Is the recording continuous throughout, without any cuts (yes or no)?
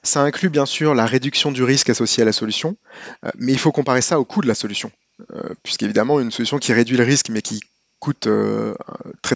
yes